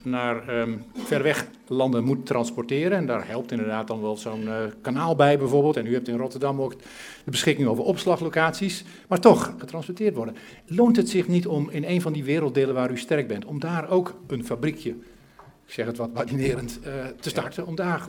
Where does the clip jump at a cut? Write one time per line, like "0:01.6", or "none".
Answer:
0:09.6